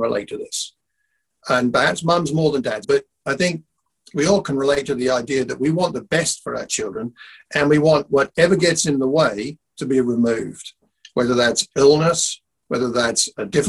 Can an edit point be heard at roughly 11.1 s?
no; 1 cut; at 2.8 s

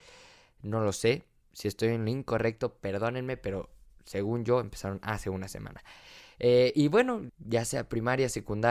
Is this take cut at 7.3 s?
yes; 1 cut; at 7.3 s

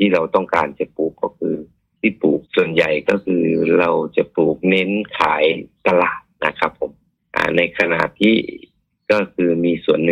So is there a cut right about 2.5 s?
yes; 1 cut; at 2.5 s

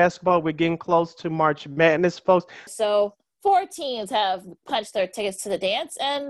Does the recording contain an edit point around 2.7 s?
yes; 1 cut; at 2.7 s

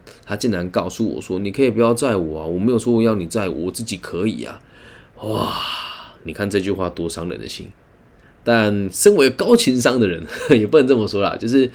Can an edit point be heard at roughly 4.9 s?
no; 0 cuts

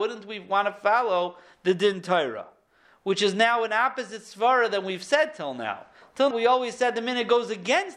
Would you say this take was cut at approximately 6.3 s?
yes; 1 cut; at 6.3 s

